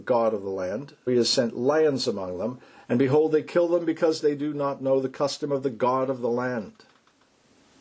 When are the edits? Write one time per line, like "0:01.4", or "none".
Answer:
0:01.1